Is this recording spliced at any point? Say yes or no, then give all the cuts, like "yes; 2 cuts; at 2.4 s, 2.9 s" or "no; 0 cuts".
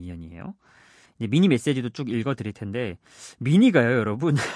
yes; 1 cut; at 1.1 s